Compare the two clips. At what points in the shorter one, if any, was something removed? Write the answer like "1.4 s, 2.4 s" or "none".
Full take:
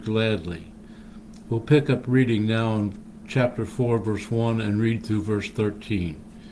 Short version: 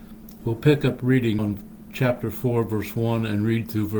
1.4 s